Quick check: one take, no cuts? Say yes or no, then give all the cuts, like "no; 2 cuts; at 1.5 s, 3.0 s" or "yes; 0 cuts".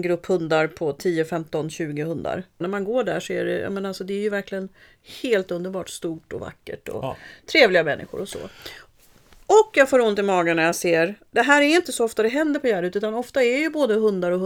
no; 1 cut; at 2.6 s